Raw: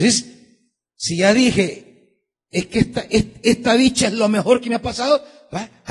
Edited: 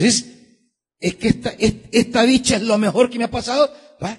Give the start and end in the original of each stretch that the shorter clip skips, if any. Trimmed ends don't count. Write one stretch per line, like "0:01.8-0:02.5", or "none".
0:00.9-0:02.4